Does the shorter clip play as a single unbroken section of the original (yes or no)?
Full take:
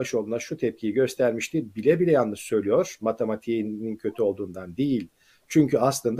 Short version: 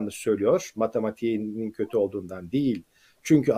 yes